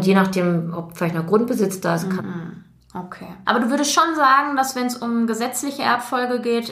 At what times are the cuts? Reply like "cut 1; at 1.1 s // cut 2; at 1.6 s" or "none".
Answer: cut 1; at 2.2 s // cut 2; at 3.5 s